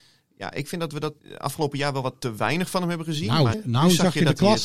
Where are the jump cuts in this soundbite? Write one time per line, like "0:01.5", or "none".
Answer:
0:01.2
0:03.5